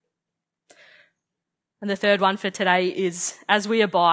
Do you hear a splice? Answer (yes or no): no